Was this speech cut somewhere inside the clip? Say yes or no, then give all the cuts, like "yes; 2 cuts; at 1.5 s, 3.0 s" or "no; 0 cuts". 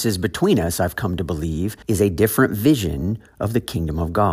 yes; 1 cut; at 1.8 s